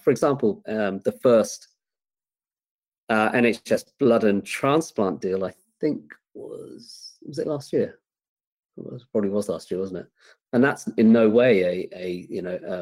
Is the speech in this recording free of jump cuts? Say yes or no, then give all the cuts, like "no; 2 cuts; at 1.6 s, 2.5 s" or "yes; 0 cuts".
yes; 0 cuts